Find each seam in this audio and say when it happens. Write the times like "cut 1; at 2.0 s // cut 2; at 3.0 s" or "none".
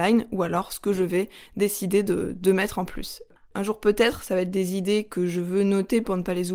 cut 1; at 3.4 s

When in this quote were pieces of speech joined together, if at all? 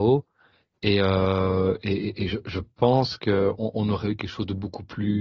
none

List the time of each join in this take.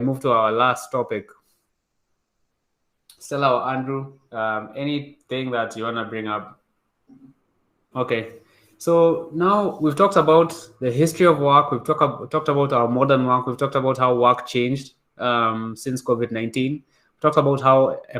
cut 1; at 7.9 s

